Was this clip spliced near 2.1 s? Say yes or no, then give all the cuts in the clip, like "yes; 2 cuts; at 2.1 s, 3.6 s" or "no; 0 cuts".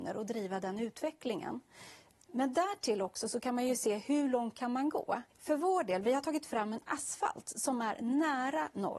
no; 1 cut; at 5.3 s